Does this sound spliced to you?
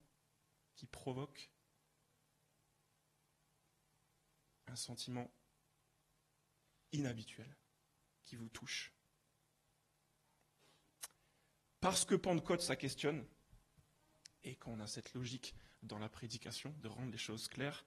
no; 0 cuts

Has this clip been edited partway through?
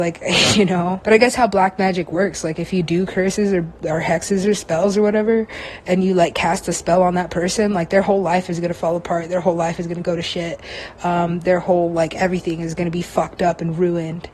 yes; 1 cut; at 1.0 s

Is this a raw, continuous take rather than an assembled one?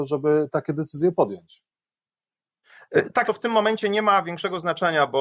no; 1 cut; at 3.2 s

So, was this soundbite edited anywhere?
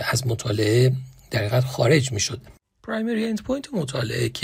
yes; 1 cut; at 2.8 s

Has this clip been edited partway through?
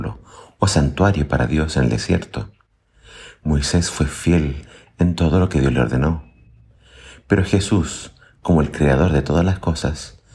no; 0 cuts

